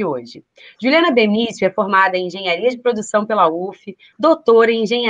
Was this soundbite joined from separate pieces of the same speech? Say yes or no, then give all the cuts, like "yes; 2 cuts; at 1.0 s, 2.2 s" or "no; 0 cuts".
yes; 1 cut; at 4.1 s